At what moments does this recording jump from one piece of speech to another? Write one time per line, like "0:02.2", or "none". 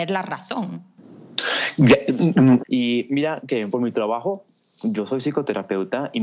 0:02.6
0:03.7